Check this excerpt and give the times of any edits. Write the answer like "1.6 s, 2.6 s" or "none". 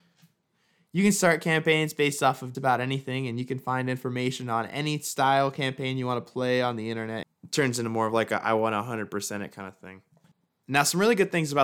2.5 s, 7.2 s